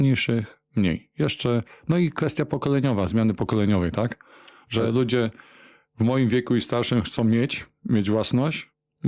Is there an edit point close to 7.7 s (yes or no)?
no